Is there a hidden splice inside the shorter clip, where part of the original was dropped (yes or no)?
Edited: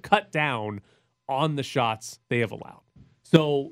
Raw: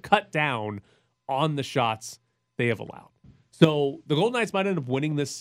yes